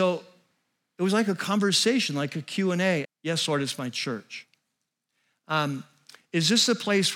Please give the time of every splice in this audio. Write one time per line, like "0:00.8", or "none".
0:03.0